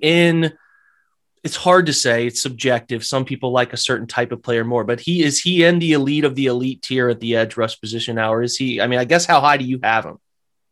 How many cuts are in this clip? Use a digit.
0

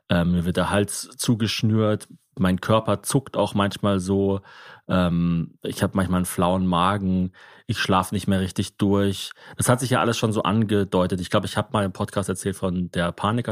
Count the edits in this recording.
0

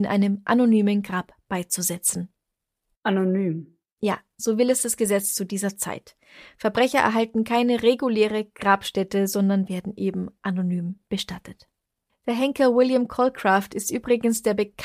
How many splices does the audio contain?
0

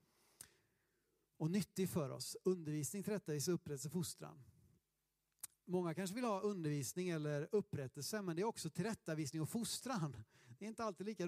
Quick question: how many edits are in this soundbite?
0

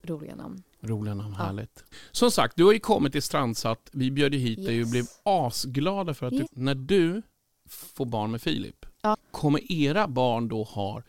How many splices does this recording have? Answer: 2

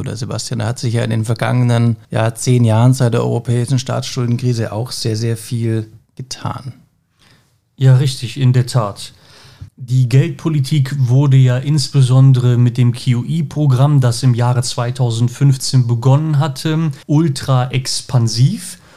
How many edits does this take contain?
3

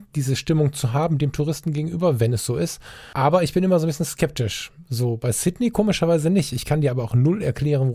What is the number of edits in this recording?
0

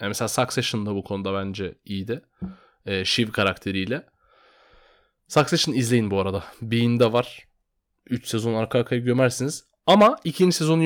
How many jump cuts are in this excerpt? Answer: 0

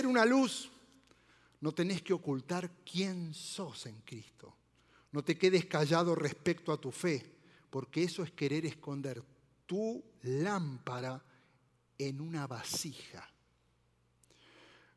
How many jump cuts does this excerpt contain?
0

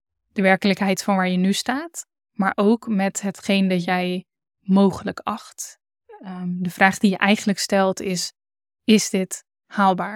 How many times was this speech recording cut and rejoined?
0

